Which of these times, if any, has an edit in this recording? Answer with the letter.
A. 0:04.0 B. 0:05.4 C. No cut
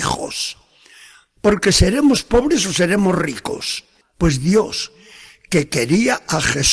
A